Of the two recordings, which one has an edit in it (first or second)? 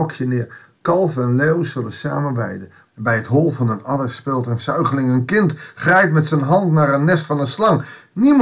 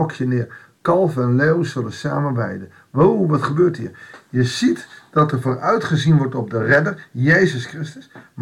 first